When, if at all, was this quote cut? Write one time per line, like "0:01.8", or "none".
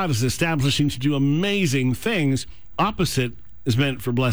0:02.7